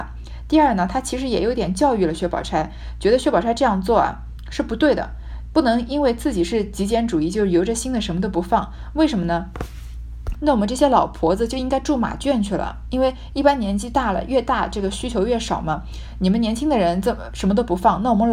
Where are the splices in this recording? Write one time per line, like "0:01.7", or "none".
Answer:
0:10.4